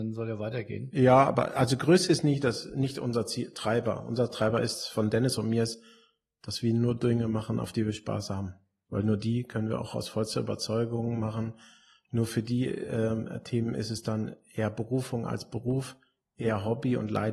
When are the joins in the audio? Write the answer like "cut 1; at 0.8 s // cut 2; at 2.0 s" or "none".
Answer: none